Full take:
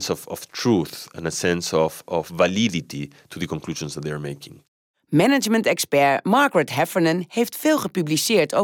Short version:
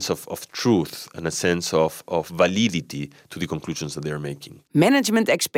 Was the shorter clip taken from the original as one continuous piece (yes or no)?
no